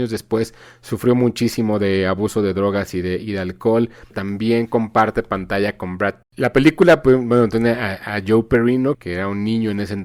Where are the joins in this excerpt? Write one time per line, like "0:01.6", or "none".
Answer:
0:04.1
0:06.2